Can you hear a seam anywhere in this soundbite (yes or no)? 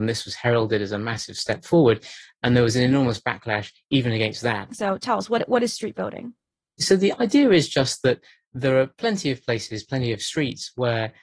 yes